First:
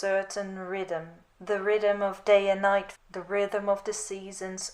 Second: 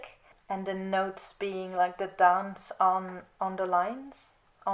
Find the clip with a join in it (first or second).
first